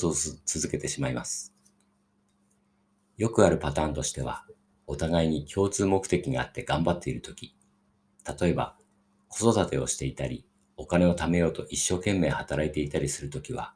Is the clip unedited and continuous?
yes; 0 cuts

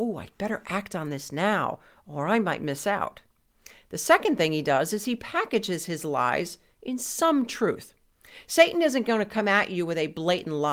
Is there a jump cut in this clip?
no; 0 cuts

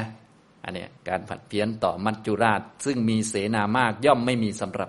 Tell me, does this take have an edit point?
yes; 1 cut; at 1.0 s

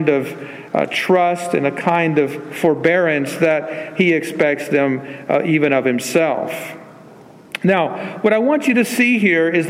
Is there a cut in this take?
no; 0 cuts

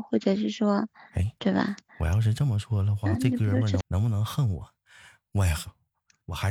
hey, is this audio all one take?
no; 1 cut; at 3.8 s

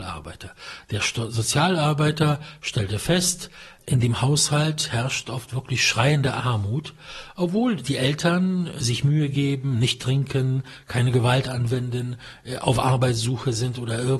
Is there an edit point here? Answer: no; 0 cuts

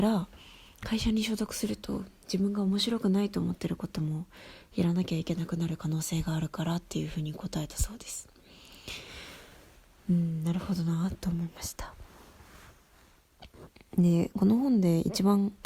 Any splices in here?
no; 0 cuts

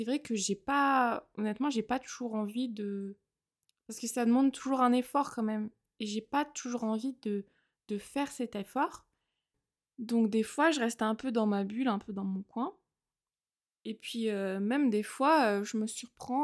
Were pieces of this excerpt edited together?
no; 0 cuts

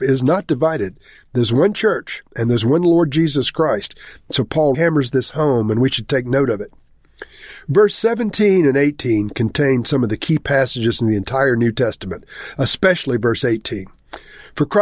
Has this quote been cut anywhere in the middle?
yes; 1 cut; at 4.7 s

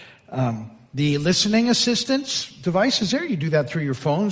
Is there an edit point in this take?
no; 0 cuts

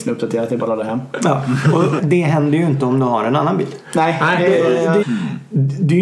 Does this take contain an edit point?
yes; 2 cuts; at 2.0 s, 5.0 s

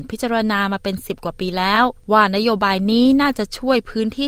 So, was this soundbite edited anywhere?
no; 0 cuts

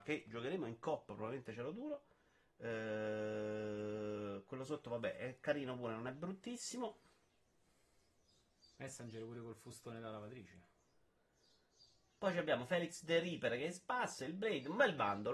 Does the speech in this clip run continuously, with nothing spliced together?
yes; 0 cuts

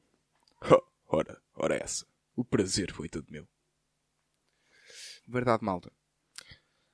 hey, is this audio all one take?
no; 1 cut; at 5.2 s

